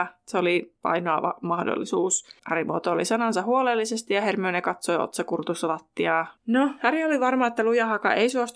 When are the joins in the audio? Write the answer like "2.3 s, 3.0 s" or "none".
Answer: 2.4 s, 6.4 s